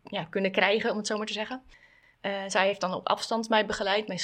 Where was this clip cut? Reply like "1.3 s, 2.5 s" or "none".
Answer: none